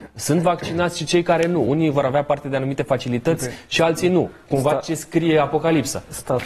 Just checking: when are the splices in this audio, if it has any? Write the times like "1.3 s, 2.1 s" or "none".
none